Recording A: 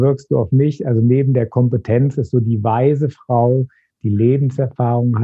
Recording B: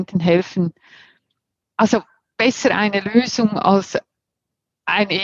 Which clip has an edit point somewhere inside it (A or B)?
B